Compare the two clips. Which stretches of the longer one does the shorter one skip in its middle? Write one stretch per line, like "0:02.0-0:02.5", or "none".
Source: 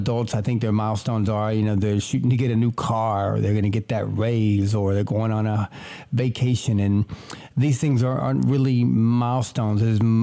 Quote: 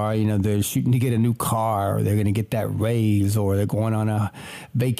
none